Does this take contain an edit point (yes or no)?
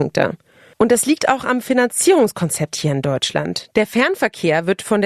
no